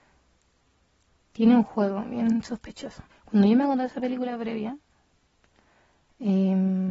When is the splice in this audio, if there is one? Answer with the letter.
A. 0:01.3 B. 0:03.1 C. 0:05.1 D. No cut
B